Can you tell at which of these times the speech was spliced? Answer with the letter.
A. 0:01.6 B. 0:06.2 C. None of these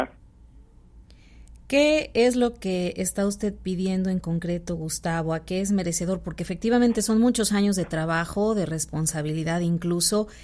C